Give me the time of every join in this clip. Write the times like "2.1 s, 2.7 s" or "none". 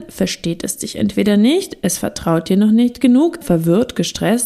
3.4 s